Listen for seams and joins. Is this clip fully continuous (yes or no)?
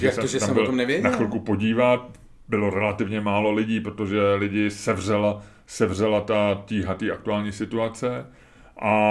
yes